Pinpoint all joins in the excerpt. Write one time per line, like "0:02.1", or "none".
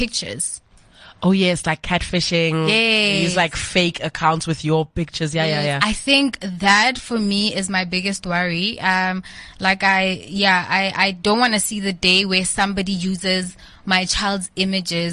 none